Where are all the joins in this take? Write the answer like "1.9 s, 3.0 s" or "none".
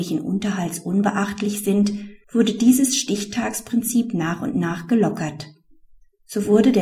2.2 s